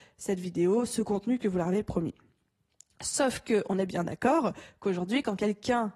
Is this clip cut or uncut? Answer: uncut